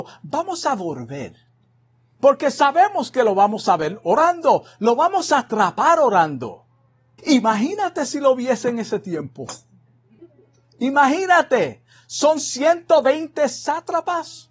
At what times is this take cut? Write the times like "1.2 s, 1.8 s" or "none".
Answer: 7.2 s